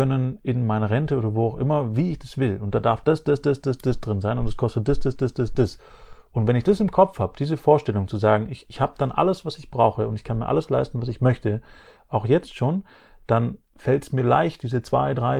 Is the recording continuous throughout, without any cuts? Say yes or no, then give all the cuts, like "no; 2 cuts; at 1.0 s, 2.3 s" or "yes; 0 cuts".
yes; 0 cuts